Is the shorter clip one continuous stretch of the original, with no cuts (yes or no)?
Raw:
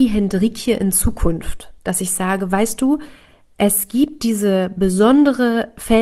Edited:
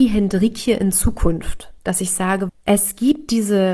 no